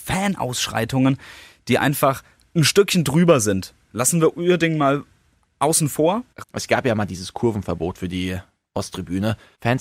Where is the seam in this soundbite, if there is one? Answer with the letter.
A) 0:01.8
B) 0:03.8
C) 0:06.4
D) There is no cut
C